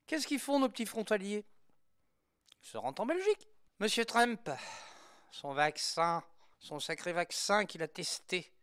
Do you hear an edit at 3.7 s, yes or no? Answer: yes